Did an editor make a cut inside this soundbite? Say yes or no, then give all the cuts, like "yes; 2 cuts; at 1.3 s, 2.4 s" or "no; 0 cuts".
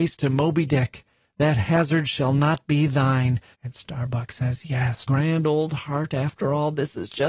yes; 2 cuts; at 3.5 s, 5.1 s